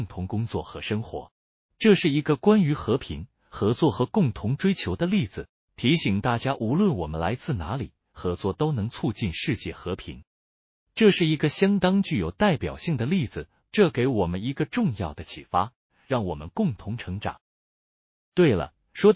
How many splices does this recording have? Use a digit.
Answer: 3